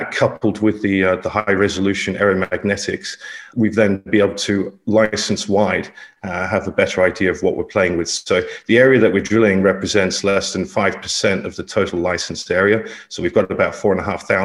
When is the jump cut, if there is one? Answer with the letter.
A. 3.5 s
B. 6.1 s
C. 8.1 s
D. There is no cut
A